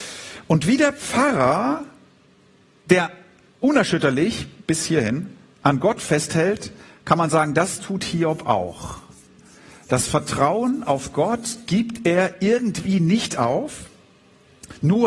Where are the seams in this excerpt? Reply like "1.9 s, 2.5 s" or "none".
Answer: none